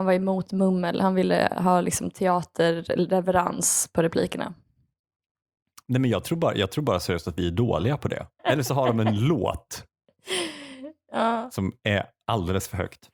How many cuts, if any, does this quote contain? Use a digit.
1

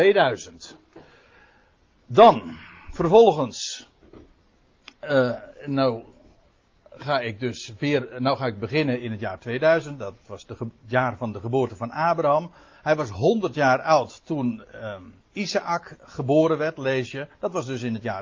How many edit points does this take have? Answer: 0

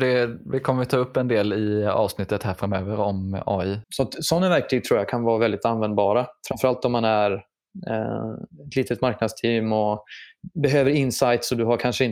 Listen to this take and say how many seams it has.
1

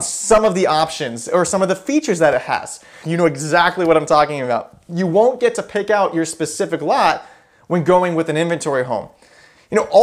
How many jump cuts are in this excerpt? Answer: 1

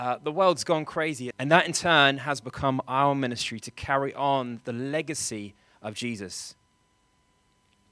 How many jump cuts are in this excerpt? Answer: 1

